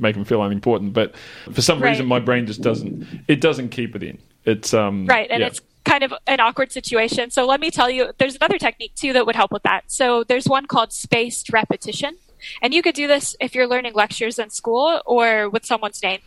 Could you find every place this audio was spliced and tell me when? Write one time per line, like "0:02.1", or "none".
0:01.5